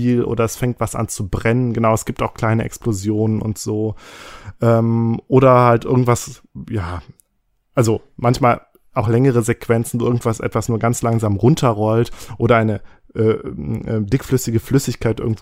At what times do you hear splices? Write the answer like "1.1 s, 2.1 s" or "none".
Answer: none